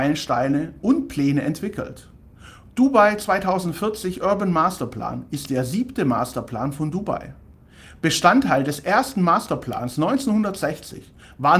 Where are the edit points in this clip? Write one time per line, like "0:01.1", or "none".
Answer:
none